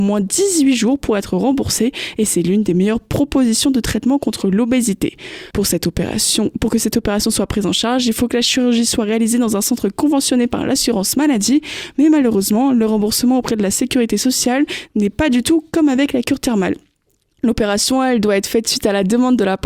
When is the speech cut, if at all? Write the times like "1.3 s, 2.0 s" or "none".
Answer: 5.5 s